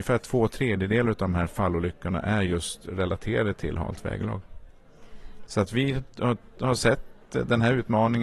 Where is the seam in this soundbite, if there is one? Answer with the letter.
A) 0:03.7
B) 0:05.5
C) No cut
B